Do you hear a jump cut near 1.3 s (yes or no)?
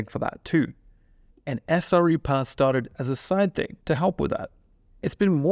yes